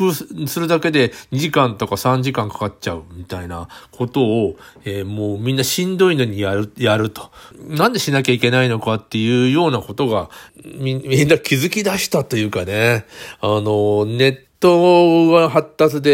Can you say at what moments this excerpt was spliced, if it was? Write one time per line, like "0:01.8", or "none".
0:14.5